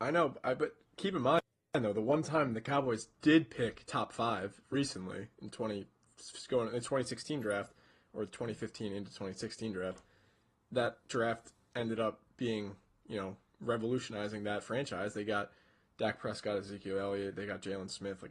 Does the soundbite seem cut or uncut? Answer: uncut